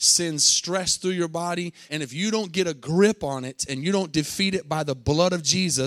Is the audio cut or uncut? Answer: cut